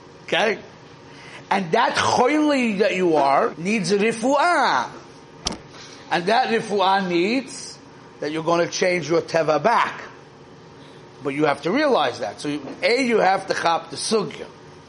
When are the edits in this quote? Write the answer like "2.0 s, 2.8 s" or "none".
3.5 s